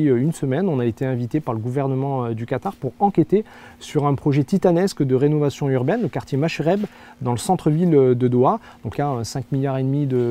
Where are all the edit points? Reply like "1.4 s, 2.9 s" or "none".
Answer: 8.9 s